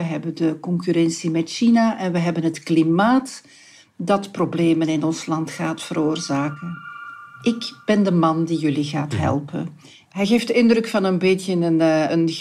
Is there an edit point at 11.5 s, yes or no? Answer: no